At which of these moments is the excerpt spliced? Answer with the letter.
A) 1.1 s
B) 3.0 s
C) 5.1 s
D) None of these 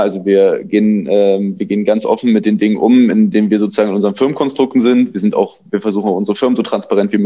D